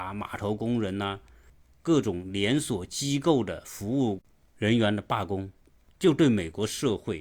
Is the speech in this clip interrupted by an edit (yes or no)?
no